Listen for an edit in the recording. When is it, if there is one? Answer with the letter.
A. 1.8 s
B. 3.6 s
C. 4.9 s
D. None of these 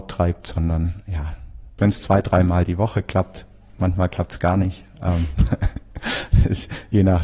A